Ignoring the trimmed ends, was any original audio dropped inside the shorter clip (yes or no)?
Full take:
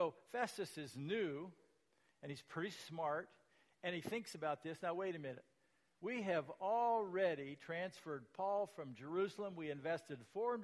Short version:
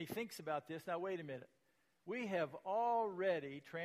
no